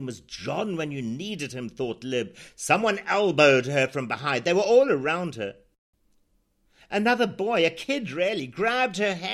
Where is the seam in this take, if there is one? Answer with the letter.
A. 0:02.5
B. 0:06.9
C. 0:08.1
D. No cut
D